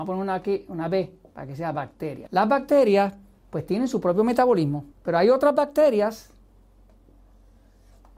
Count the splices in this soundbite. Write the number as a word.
two